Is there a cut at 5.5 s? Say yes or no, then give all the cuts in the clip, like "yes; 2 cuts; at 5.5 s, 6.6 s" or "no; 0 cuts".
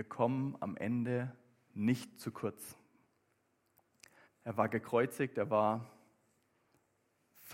no; 1 cut; at 4.2 s